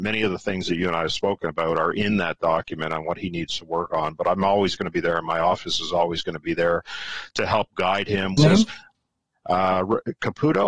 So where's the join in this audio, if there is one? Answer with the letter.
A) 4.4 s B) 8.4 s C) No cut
B